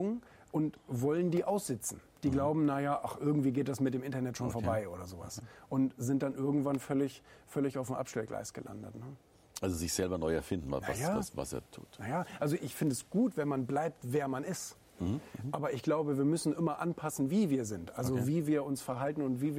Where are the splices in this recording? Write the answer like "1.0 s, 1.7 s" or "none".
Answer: none